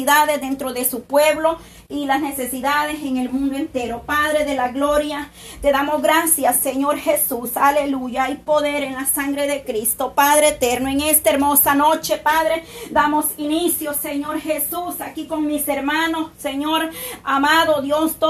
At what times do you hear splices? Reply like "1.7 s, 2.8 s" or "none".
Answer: none

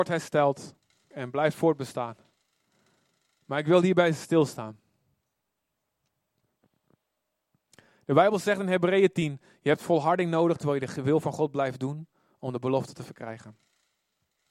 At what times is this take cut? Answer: 1.1 s

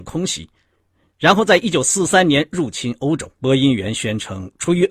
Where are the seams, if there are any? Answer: 3.3 s

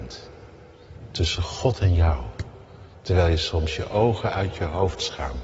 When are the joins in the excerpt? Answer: none

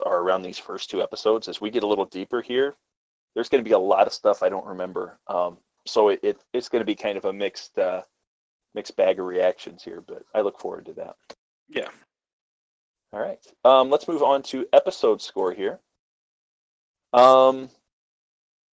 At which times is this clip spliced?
6.4 s

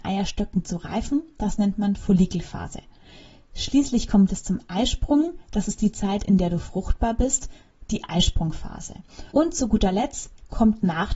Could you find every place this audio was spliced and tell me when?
9.3 s

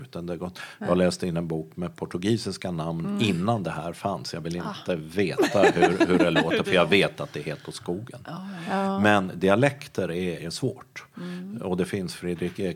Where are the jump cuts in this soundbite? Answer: 10.4 s

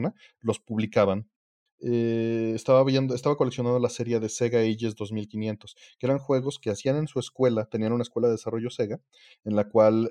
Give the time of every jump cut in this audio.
1.7 s

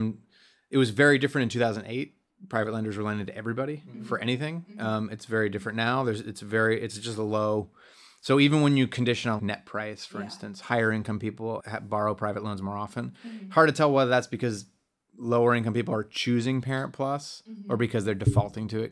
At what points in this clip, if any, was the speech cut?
9.4 s, 11.6 s

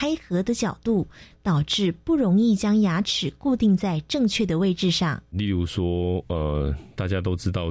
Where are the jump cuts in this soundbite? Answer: 1.3 s

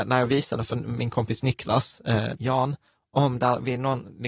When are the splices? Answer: 2.4 s

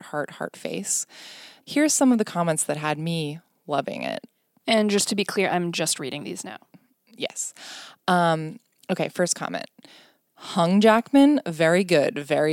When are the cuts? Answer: 1.6 s

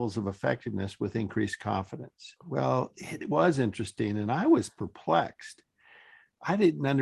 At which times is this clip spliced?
2.4 s

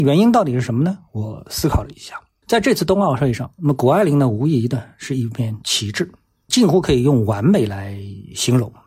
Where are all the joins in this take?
2.4 s

